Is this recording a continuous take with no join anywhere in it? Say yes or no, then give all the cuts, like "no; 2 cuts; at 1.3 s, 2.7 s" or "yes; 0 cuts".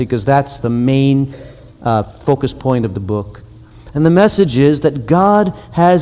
yes; 0 cuts